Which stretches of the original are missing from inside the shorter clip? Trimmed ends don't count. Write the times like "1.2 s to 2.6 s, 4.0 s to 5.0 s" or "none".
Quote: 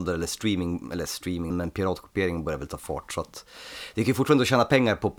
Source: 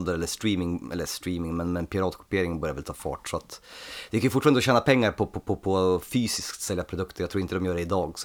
1.5 s to 1.7 s